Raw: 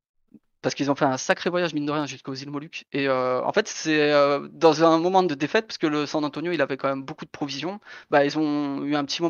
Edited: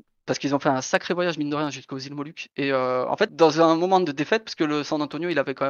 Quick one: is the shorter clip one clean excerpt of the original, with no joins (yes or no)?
no